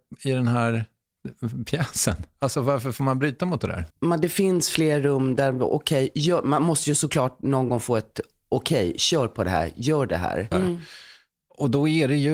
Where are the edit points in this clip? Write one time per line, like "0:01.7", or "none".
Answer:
0:03.9
0:10.5